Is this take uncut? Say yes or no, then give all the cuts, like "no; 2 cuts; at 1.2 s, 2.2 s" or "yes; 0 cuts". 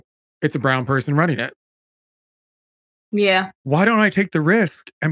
no; 1 cut; at 3.0 s